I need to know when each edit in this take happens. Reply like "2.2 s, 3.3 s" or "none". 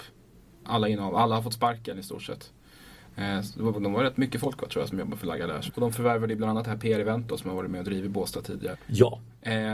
5.7 s, 8.7 s